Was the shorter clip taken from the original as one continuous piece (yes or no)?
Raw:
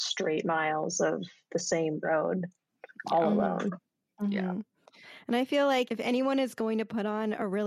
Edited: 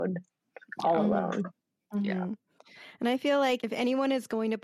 yes